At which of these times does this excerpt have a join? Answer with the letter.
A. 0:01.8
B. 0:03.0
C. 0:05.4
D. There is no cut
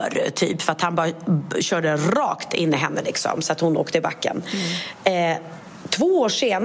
D